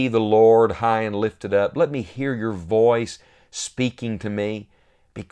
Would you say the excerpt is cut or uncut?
uncut